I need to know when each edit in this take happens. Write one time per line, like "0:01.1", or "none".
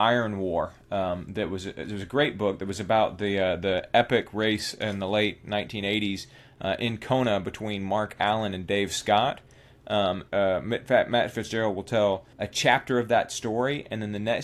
0:10.3
0:12.3